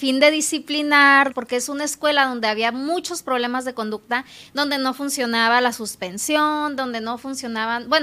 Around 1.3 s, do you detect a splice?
yes; 1 cut; at 1.3 s

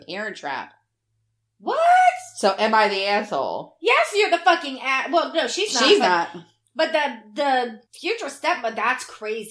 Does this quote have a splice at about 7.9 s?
yes; 1 cut; at 7.9 s

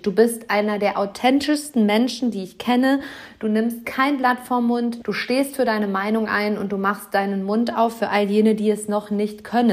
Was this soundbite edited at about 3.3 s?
no; 1 cut; at 5.0 s

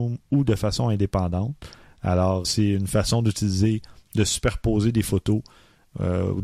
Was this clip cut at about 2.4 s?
yes; 1 cut; at 2.4 s

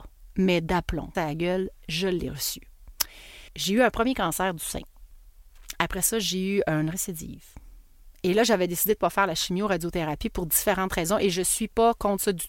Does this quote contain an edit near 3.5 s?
yes; 2 cuts; at 1.1 s, 3.5 s

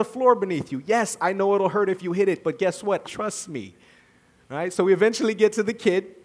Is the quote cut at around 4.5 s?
no; 1 cut; at 3.0 s

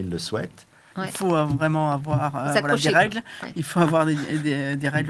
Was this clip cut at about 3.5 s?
no; 1 cut; at 0.9 s

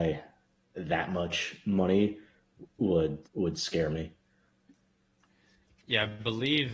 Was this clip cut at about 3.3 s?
yes; 1 cut; at 3.3 s

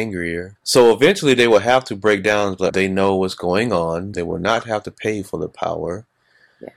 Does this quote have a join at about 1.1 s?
no; 2 cuts; at 2.7 s, 4.1 s

